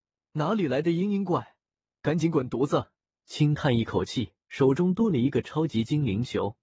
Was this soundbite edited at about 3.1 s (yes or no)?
yes